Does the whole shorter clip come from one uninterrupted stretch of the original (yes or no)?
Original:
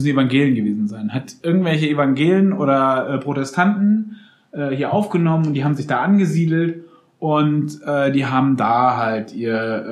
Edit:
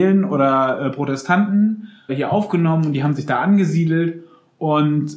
no